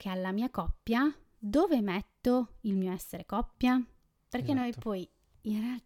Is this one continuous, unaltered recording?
yes; 0 cuts

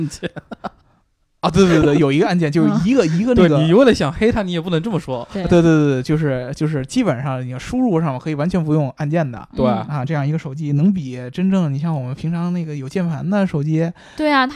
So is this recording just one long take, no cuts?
no; 1 cut; at 1.8 s

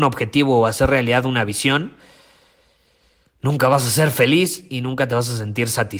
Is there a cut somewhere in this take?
no; 0 cuts

